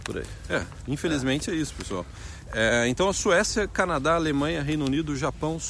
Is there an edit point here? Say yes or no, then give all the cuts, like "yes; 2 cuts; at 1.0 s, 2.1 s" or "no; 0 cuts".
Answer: no; 0 cuts